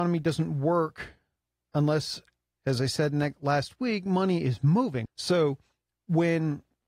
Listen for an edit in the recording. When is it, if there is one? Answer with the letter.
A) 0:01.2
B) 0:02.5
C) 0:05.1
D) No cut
C